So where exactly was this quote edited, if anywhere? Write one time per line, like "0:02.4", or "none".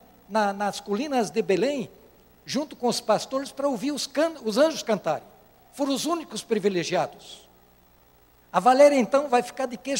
0:08.4

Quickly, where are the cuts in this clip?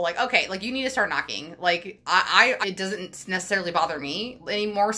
0:02.6

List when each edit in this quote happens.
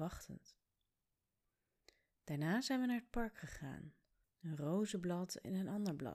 0:04.2

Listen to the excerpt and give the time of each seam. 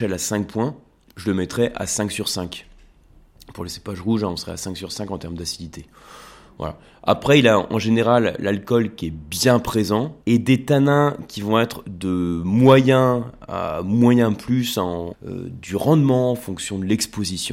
0:10.2
0:15.1

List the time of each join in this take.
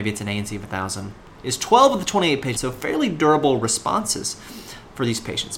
0:02.6

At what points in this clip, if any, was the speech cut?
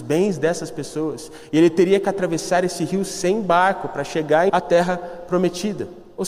0:04.5

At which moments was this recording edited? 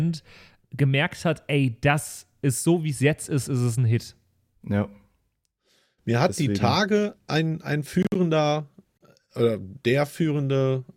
none

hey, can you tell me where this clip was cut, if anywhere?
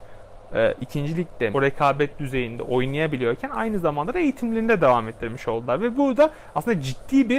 0:01.5

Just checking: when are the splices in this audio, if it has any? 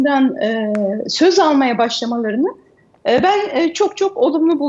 none

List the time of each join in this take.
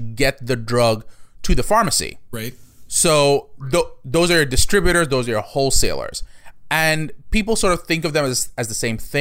none

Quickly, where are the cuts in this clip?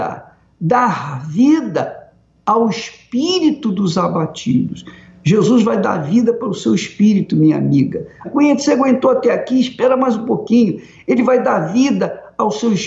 0:08.2

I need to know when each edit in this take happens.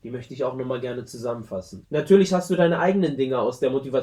0:01.8

